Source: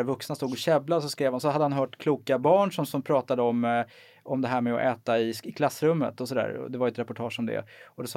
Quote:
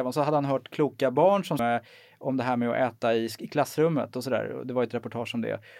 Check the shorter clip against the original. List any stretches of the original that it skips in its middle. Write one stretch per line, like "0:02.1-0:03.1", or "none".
0:02.9-0:03.6